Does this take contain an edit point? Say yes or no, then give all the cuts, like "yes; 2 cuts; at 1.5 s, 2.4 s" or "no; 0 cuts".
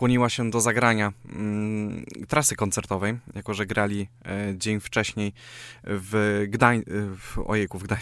no; 0 cuts